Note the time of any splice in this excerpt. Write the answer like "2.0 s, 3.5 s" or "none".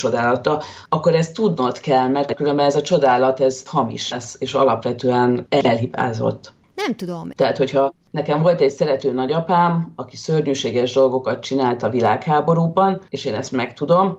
7.3 s